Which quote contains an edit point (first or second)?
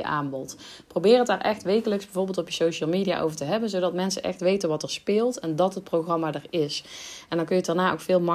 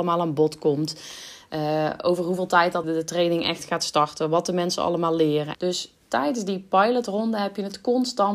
second